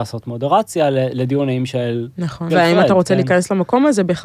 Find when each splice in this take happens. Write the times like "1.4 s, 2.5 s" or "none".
2.5 s